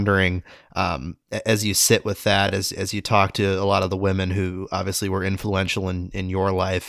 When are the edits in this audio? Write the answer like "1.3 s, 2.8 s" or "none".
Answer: none